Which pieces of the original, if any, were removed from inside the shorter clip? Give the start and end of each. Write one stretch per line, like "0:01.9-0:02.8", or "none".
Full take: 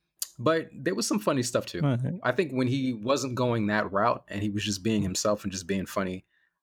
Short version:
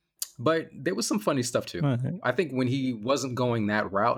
none

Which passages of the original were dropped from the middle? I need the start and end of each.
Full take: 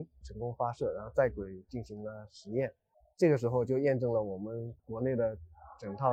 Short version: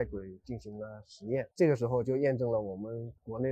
0:02.8-0:03.1

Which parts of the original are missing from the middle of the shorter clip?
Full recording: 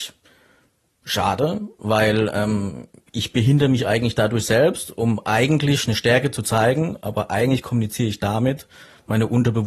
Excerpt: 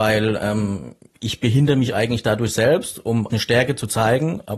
0:05.2-0:05.9

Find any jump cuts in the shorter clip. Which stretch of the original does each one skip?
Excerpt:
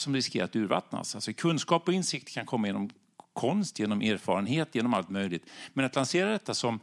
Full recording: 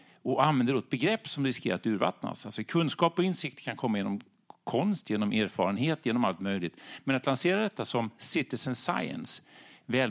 none

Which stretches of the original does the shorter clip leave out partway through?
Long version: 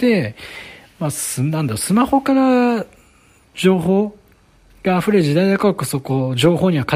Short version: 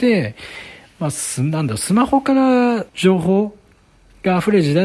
0:02.9-0:03.5

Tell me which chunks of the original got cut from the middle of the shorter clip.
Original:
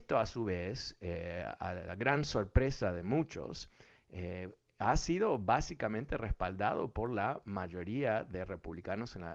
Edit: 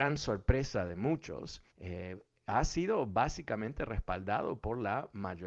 0:03.8-0:04.0

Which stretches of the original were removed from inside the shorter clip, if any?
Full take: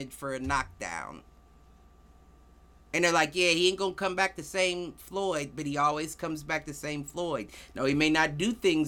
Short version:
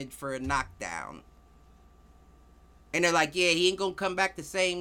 none

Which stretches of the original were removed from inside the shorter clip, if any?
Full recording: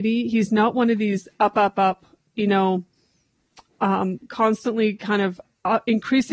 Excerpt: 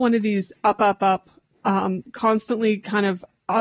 0:02.3-0:03.7

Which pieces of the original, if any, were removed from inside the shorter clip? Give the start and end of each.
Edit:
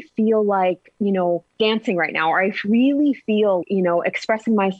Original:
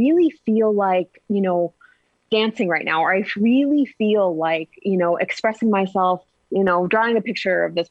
0:01.8-0:02.2
0:04.3-0:04.8

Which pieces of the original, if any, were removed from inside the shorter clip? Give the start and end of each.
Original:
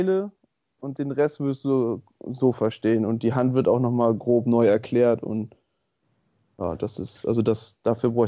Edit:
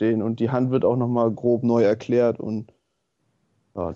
none

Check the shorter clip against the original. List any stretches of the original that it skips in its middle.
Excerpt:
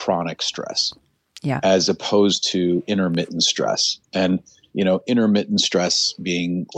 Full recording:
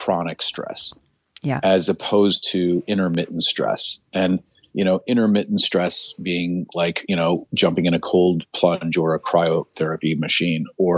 none

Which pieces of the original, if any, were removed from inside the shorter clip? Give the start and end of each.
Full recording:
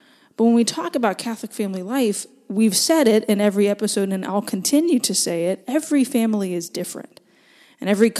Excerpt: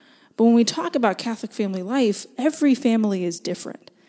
0:02.4-0:05.6

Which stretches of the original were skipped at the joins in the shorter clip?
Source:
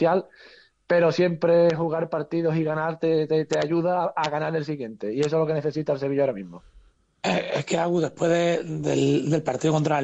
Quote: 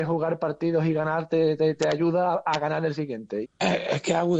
0:05.1-0:07.1

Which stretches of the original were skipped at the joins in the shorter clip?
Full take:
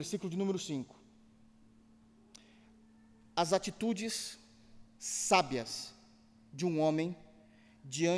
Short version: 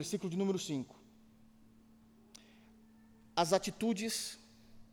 none

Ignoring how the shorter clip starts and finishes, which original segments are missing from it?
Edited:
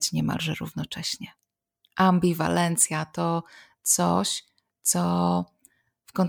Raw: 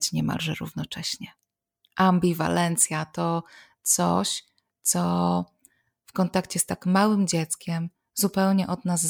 none

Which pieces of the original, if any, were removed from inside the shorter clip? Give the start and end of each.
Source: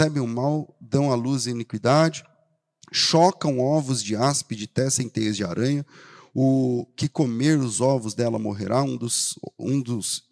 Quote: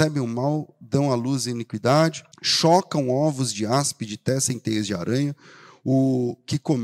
0:02.3-0:02.8

